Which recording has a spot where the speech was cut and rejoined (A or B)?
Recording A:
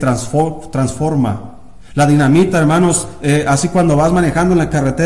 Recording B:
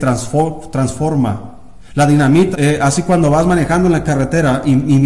B